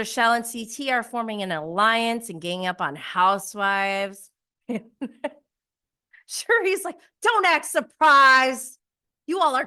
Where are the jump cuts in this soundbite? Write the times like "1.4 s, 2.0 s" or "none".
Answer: 4.6 s